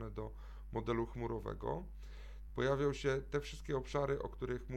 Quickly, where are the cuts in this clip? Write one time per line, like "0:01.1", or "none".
0:02.5